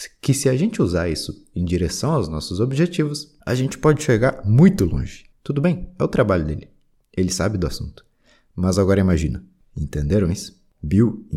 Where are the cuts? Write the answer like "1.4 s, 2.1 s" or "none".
5.3 s, 9.6 s